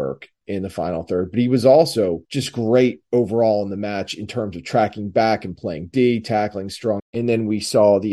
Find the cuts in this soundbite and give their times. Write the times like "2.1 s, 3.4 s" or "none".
2.2 s, 7.0 s